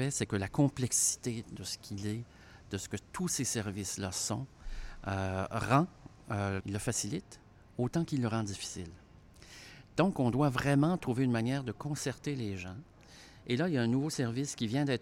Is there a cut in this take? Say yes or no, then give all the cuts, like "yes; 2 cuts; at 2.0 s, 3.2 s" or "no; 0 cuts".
yes; 1 cut; at 6.6 s